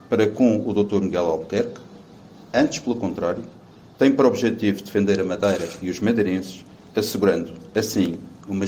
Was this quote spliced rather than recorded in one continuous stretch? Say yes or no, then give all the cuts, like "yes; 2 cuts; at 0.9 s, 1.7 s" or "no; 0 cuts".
no; 0 cuts